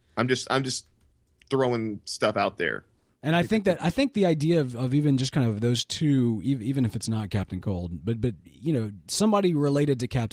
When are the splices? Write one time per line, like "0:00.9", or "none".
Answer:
0:03.1